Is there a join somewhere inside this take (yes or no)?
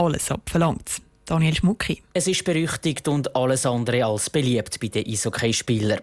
yes